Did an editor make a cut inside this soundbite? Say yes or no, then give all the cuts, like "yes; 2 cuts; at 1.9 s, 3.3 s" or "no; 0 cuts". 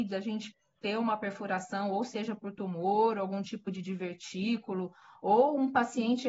no; 0 cuts